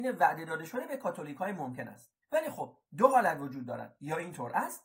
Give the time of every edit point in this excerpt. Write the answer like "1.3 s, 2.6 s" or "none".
2.2 s